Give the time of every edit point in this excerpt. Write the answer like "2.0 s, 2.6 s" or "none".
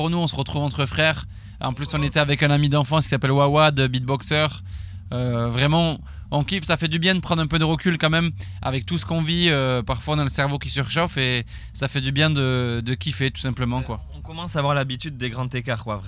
none